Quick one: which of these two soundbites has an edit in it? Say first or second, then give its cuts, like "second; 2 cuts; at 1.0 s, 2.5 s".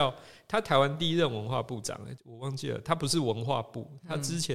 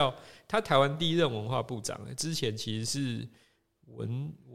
first; 1 cut; at 2.2 s